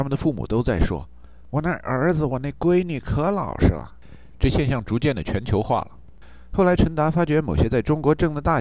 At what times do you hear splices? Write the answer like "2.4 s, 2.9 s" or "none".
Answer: none